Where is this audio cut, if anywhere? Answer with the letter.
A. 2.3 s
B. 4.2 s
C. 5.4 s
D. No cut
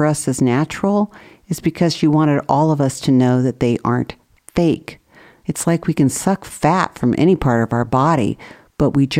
C